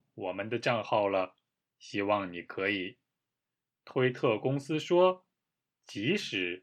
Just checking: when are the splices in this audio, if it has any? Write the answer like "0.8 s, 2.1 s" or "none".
1.6 s